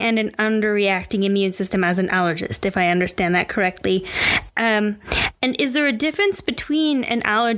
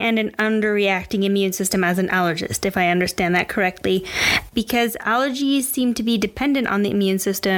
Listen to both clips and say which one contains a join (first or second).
second